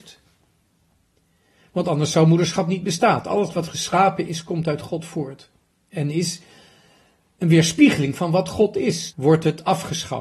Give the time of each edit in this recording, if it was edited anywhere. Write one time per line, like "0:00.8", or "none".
0:09.1